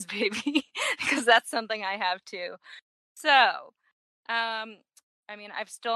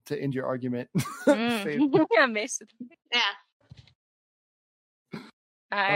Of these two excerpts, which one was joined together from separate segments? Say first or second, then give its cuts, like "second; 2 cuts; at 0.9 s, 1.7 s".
second; 1 cut; at 3.6 s